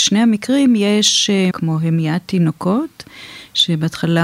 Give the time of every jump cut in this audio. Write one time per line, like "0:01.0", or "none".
0:01.5